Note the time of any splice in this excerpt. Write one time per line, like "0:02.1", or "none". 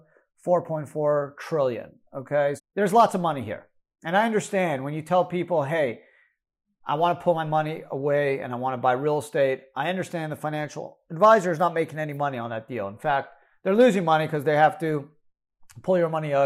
0:02.6